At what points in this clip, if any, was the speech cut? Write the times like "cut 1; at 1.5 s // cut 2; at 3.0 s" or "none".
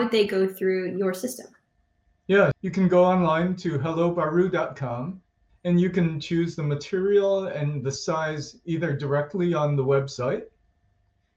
cut 1; at 2.5 s // cut 2; at 5.5 s